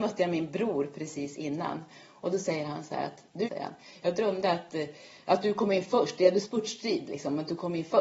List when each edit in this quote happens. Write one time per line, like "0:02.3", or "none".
0:03.4